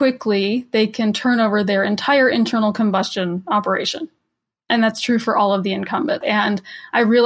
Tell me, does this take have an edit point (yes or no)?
yes